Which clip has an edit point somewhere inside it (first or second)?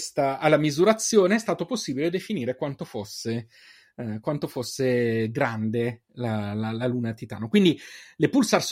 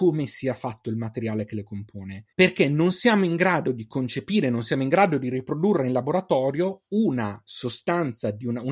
second